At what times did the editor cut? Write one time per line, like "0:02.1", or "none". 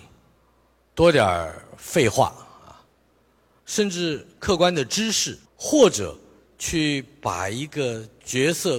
0:03.6
0:05.4

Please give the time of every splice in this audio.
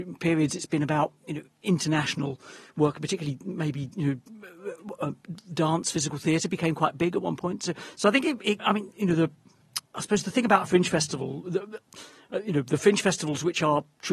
0:08.6
0:09.9

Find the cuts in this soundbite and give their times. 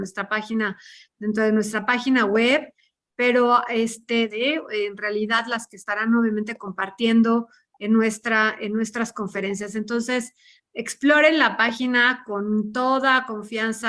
0:04.3

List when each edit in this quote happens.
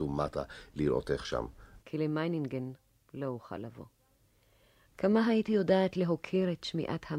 0:01.8
0:04.8

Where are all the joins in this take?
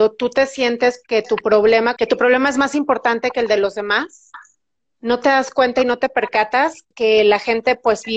0:02.0
0:06.9

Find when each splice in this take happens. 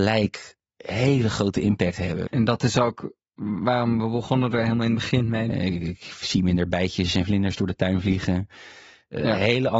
0:02.3
0:05.5

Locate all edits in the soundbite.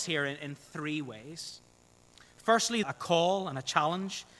0:02.8

